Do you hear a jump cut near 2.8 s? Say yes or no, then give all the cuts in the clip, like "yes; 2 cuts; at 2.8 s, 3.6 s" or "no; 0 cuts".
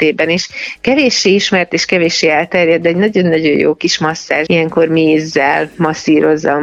no; 1 cut; at 4.5 s